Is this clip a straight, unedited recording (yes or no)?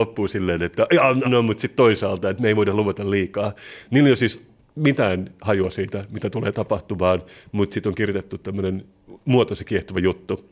no